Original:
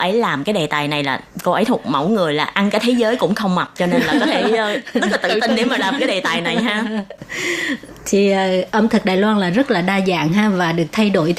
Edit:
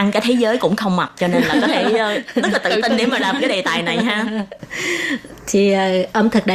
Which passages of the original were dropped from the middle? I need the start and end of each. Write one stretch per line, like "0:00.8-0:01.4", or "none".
none